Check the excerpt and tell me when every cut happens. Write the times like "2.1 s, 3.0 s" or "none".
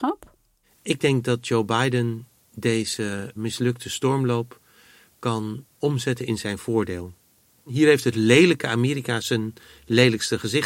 3.4 s